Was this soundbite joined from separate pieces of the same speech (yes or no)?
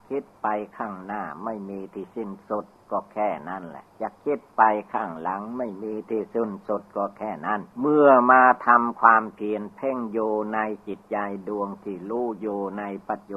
yes